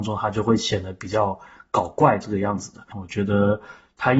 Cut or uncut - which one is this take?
cut